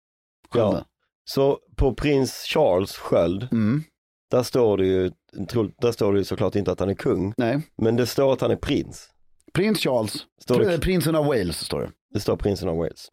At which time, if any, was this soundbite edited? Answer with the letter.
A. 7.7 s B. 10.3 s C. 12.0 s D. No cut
B